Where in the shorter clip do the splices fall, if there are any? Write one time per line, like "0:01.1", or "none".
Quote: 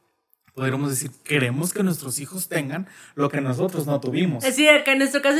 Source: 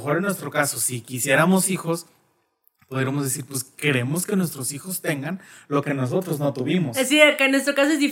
0:01.1